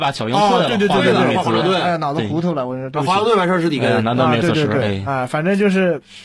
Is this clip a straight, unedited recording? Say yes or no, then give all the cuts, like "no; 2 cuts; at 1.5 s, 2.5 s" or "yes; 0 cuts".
yes; 0 cuts